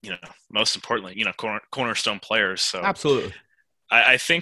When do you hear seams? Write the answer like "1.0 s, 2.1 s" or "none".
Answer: 1.1 s

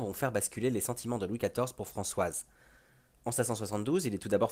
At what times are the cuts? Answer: none

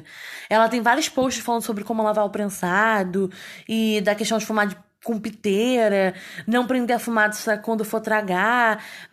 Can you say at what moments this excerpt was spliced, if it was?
none

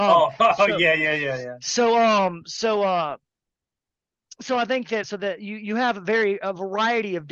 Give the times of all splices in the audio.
5.0 s

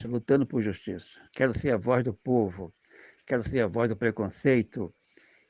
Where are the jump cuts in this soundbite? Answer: 1.3 s

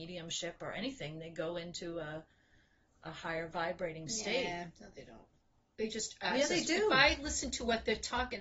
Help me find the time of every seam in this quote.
none

